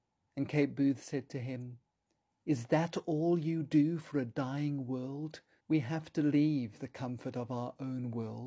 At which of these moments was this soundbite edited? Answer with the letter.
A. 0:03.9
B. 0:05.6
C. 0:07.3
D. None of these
B